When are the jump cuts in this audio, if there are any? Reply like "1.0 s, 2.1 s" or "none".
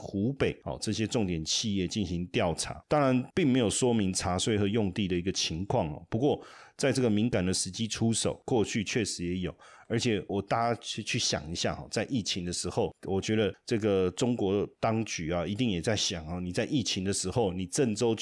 10.3 s